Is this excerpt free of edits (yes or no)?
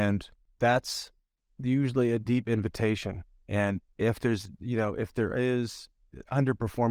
no